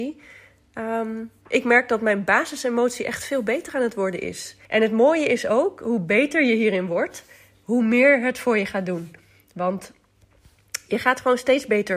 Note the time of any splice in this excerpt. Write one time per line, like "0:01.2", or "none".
0:01.5
0:04.6